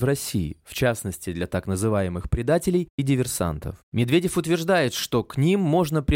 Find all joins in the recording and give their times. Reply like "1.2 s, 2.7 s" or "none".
3.8 s

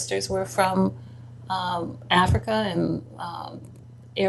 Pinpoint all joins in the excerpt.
none

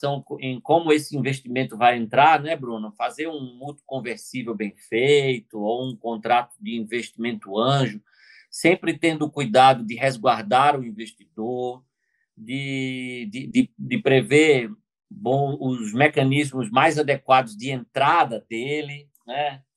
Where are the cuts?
none

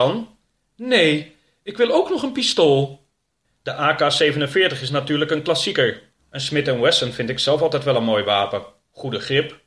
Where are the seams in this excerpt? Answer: 3.4 s, 6.2 s

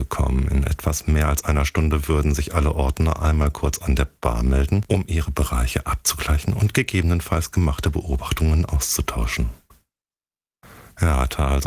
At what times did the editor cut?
none

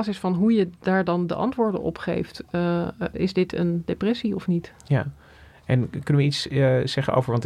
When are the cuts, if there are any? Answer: 3.1 s

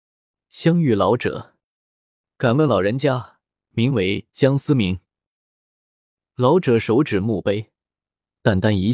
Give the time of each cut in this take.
3.7 s

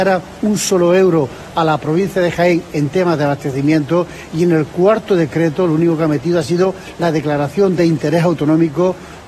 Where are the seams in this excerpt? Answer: none

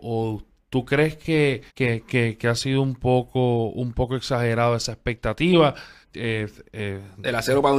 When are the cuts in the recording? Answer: 1.7 s, 6.0 s

